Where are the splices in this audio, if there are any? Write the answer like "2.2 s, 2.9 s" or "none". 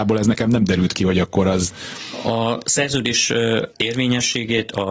3.7 s